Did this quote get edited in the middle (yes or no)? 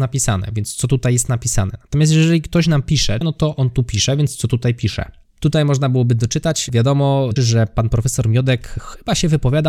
yes